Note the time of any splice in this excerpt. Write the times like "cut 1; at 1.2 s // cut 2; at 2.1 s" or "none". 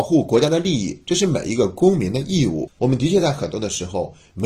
cut 1; at 2.8 s